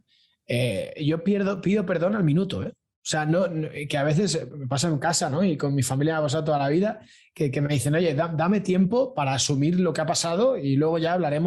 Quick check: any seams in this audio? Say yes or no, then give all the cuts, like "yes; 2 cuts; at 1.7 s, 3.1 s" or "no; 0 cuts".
no; 0 cuts